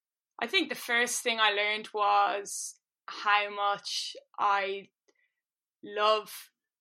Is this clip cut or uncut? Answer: uncut